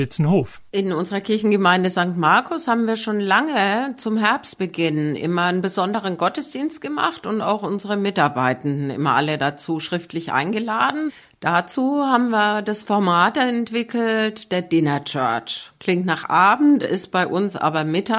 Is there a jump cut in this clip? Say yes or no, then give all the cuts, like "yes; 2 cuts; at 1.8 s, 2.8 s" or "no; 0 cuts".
no; 0 cuts